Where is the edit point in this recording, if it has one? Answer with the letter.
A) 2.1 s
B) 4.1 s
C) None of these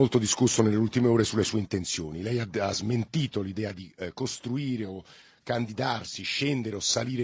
C